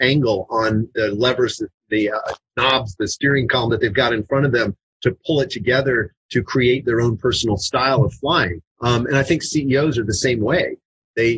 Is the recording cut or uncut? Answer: cut